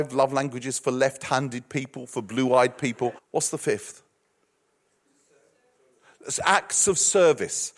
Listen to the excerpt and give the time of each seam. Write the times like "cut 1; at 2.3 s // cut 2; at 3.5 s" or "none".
cut 1; at 3.2 s